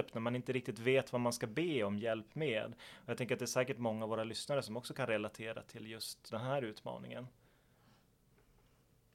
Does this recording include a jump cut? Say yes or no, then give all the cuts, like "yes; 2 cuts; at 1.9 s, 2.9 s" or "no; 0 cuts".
yes; 1 cut; at 6.3 s